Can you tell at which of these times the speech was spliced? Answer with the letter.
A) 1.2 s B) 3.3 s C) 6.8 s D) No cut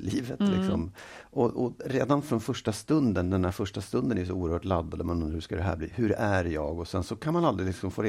D